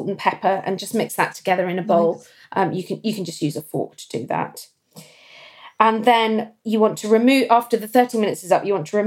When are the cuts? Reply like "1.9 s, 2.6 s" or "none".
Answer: none